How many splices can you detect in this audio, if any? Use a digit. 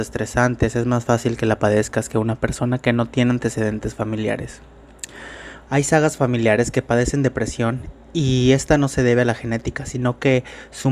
1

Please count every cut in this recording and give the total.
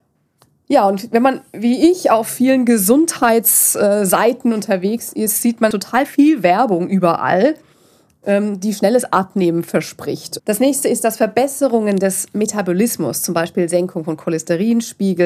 2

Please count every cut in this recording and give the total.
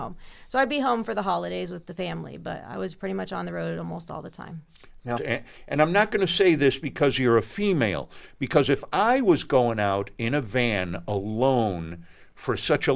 1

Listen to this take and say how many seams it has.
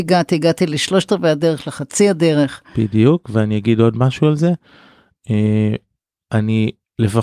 0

